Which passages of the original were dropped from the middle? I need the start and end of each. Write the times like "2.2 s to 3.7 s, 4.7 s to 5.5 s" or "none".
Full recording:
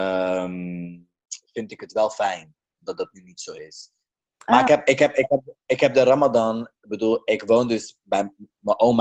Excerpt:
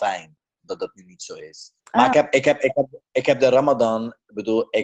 4.0 s to 4.3 s